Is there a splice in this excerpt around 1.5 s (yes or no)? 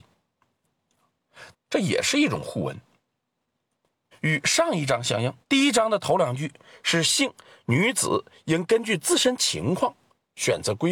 yes